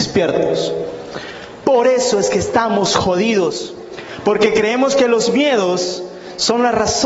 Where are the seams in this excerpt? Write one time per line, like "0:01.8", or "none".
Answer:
0:01.6

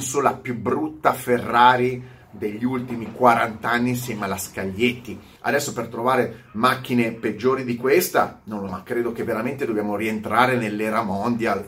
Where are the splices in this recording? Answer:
0:05.4
0:08.7

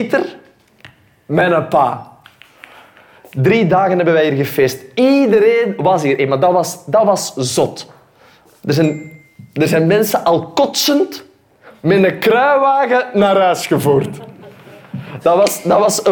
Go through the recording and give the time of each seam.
0:15.2

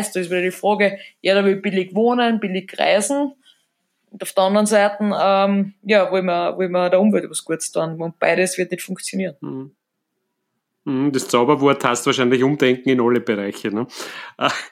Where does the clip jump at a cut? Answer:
none

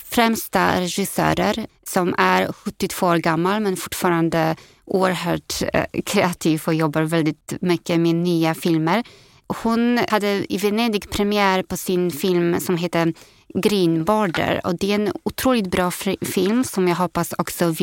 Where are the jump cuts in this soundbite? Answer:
0:01.7

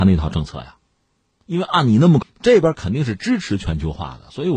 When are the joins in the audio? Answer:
0:02.2

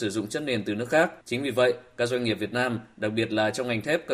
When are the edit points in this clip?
0:01.2

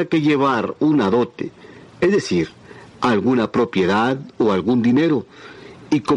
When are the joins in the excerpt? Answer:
none

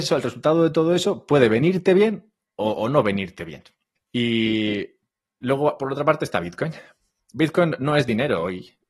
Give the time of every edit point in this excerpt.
0:04.0

